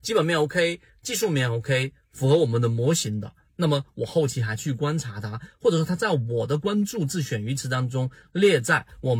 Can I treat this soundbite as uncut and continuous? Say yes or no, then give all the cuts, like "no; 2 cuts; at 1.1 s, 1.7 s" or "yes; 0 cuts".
yes; 0 cuts